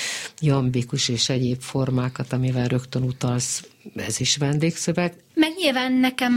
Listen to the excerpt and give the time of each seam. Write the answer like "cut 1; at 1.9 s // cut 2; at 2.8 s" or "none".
cut 1; at 5.3 s

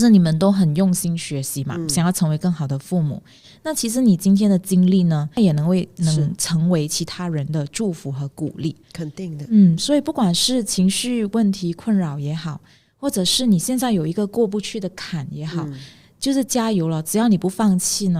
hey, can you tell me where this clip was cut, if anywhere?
none

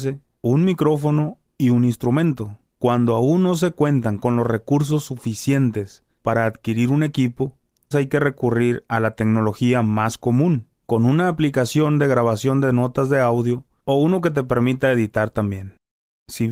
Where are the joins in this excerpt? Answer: cut 1; at 7.9 s // cut 2; at 10.7 s

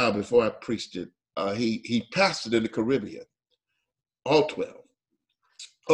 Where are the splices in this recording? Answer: cut 1; at 1.3 s // cut 2; at 4.2 s

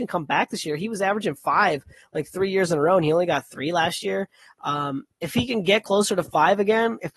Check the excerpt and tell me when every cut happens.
none

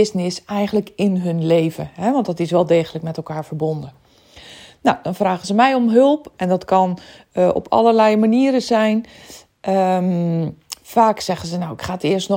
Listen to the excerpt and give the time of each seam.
none

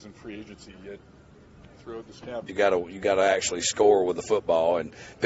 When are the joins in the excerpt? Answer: cut 1; at 2.5 s

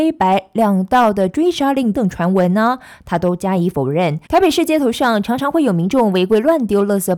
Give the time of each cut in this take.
cut 1; at 1.9 s // cut 2; at 4.3 s

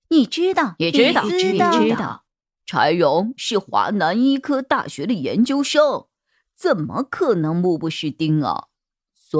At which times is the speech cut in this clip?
cut 1; at 2.6 s

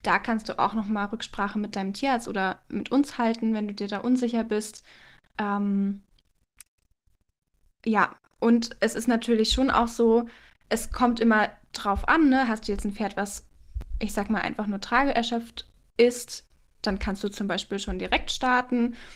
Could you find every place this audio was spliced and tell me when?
none

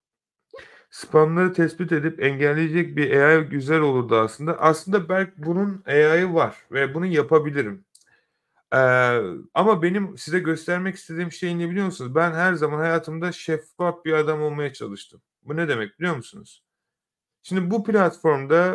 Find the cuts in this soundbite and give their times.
none

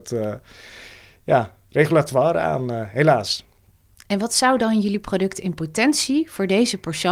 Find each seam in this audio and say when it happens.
none

